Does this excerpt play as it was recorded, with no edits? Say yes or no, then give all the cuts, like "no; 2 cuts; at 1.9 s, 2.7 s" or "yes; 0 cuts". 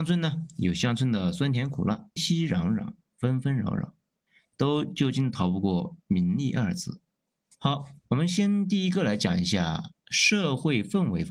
no; 2 cuts; at 2.2 s, 7.5 s